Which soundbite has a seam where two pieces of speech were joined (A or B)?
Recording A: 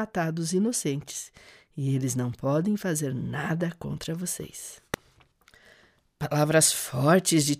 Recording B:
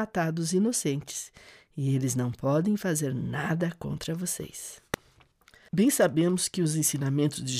B